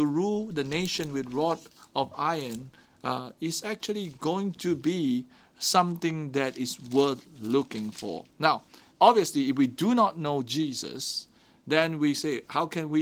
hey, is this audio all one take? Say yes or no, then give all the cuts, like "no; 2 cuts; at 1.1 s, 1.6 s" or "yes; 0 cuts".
yes; 0 cuts